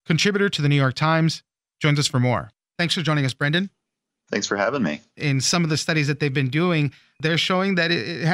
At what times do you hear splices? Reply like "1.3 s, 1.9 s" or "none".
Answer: 5.1 s